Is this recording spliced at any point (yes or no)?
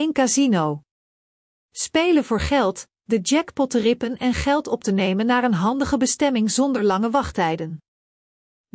yes